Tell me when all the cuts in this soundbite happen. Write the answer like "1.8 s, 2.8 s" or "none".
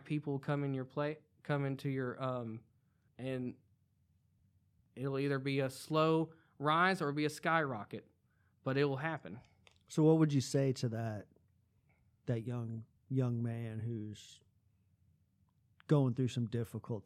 3.1 s